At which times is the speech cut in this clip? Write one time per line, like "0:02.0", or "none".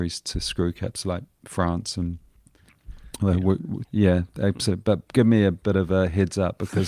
0:03.8